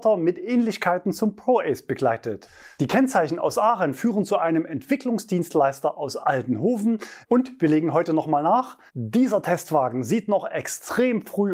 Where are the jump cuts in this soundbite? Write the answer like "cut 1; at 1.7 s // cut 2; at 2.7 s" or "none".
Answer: cut 1; at 7.2 s // cut 2; at 8.9 s